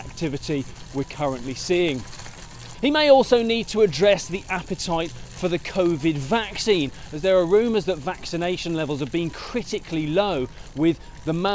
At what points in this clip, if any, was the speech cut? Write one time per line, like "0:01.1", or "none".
0:02.7

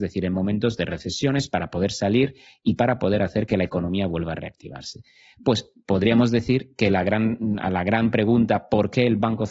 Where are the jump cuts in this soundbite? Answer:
none

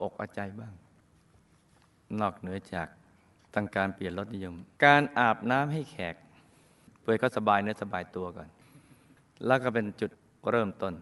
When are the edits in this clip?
0:04.7

